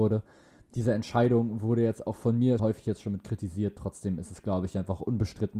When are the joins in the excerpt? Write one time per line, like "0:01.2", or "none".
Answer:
0:02.6